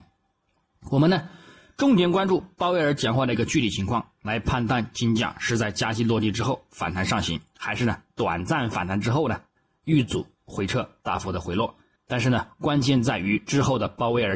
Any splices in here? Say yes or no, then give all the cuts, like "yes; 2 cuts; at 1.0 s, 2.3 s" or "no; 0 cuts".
yes; 1 cut; at 12.0 s